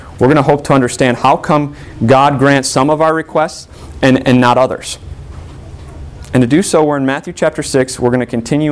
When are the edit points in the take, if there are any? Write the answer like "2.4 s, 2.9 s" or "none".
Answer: none